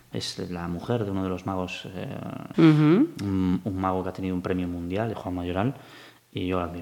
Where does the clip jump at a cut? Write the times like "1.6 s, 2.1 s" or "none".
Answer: 2.5 s, 5.1 s